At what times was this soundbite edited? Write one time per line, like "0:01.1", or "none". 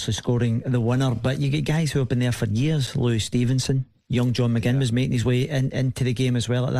none